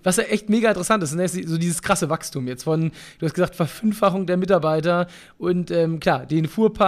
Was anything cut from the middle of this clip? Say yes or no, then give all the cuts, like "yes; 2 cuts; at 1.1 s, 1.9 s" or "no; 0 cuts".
no; 0 cuts